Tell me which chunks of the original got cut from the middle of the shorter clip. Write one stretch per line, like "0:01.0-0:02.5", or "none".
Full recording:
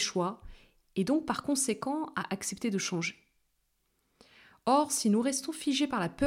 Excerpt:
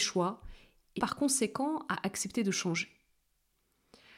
0:01.0-0:01.2